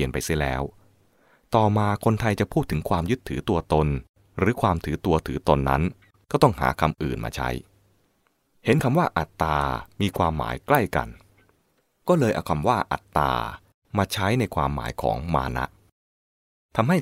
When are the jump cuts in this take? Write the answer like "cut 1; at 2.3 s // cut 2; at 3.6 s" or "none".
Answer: none